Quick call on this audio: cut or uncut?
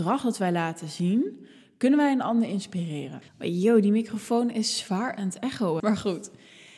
cut